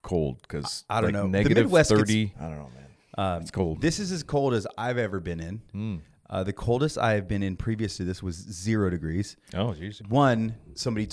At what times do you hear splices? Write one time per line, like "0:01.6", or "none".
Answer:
0:02.3
0:10.0